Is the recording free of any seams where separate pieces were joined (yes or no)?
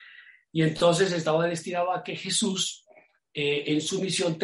yes